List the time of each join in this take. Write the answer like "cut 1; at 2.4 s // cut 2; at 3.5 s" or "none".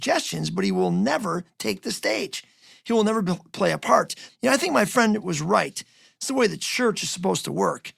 cut 1; at 4.3 s